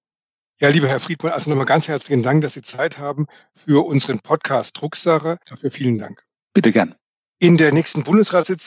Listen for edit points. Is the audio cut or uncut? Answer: uncut